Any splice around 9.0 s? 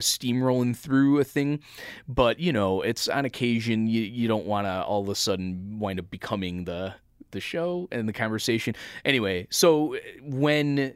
yes; 1 cut; at 9.0 s

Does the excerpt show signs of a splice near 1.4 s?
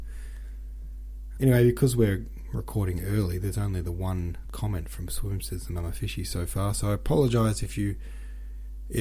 yes; 1 cut; at 1.4 s

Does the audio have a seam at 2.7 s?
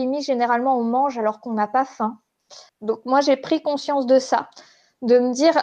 yes; 1 cut; at 2.7 s

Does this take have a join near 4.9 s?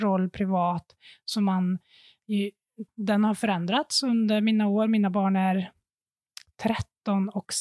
no; 1 cut; at 2.9 s

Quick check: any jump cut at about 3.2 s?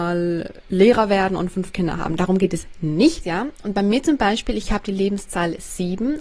yes; 1 cut; at 3.2 s

